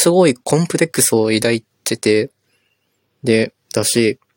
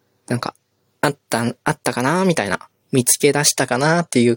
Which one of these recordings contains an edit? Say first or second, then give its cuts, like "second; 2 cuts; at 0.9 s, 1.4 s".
first; 1 cut; at 1.7 s